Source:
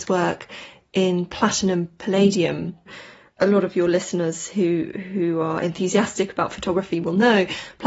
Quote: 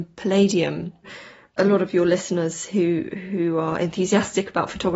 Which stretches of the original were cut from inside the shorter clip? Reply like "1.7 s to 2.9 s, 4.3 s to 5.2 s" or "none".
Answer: none